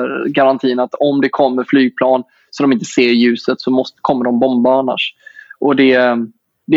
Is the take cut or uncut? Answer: uncut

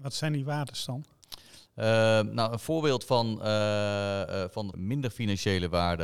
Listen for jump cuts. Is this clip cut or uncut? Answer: cut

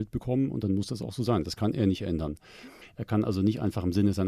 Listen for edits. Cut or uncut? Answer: cut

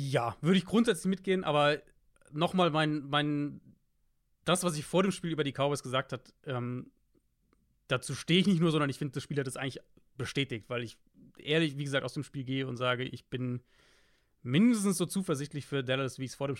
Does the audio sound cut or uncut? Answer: uncut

